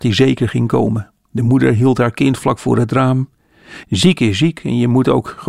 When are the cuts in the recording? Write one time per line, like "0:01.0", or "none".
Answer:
0:03.8